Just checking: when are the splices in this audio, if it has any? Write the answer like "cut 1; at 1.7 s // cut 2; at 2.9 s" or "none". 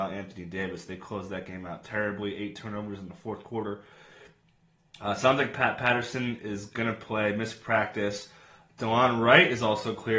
none